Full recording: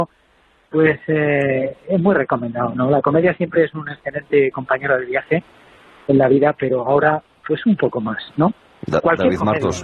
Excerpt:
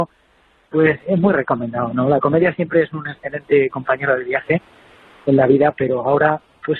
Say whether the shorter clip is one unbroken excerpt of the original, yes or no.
no